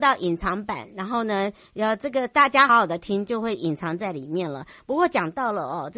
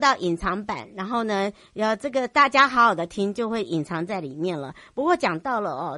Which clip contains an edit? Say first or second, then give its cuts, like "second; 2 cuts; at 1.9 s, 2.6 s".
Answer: first; 1 cut; at 2.7 s